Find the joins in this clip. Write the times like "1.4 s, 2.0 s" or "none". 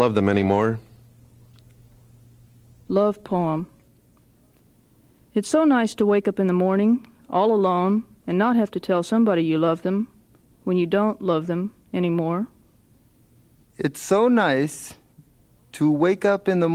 13.6 s